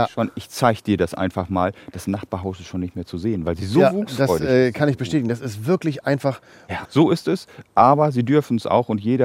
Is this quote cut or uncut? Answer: cut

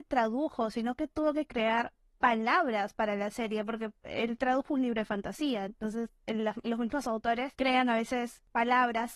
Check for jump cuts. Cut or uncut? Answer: uncut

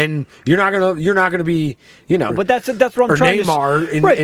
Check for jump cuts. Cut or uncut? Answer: cut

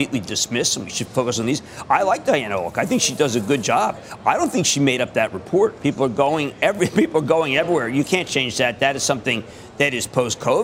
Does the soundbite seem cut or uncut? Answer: cut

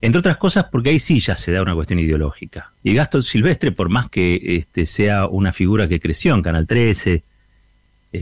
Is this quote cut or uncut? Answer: cut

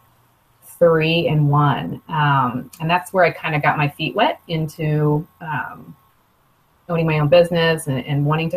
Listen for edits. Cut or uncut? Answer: uncut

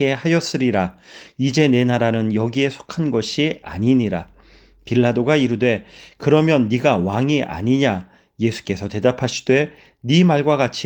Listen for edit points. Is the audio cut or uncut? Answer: uncut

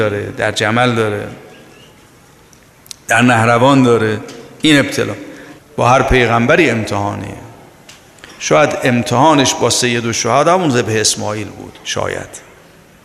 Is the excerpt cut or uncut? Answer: cut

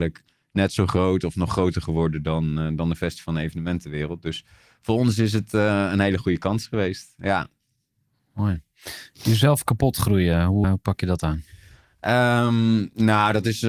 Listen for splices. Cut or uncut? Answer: cut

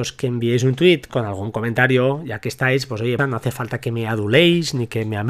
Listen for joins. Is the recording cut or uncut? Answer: cut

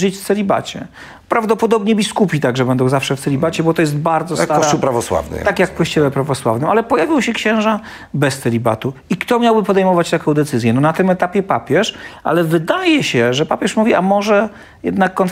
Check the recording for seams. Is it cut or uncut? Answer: uncut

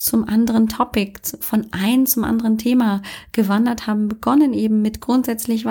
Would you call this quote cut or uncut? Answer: uncut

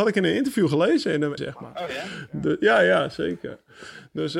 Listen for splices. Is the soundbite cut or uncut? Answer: cut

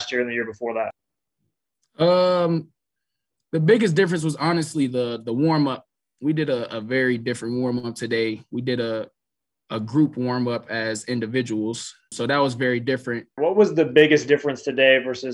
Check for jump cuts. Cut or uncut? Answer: cut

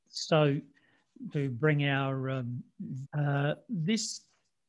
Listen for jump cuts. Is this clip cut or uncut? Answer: cut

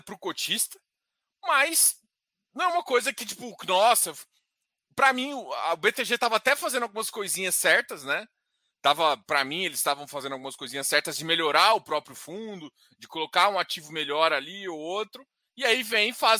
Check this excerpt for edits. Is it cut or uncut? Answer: uncut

